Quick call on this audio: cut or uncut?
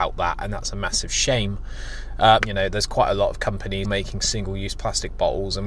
cut